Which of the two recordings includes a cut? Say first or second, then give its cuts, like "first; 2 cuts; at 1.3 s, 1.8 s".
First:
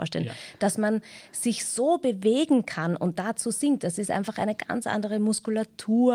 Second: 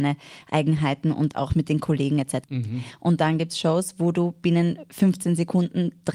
second; 1 cut; at 2.4 s